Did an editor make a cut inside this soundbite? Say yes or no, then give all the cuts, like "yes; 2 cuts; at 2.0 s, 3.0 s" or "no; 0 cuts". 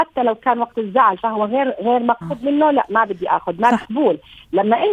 yes; 2 cuts; at 2.2 s, 3.8 s